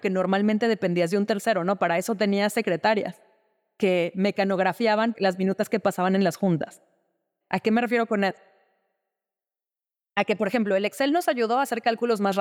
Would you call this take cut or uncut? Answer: cut